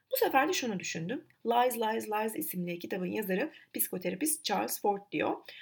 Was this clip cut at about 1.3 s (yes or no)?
yes